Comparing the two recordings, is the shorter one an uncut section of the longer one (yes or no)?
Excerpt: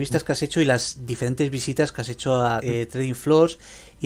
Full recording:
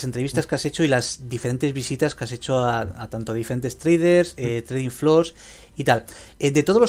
no